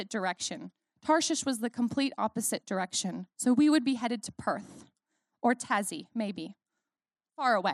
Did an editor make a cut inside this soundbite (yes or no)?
no